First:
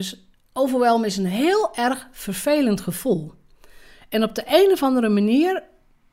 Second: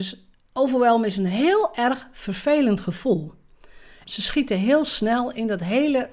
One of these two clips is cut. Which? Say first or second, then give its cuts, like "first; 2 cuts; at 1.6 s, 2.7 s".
second; 1 cut; at 4.0 s